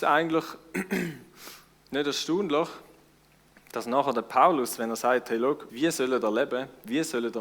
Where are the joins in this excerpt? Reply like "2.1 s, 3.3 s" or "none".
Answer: 5.7 s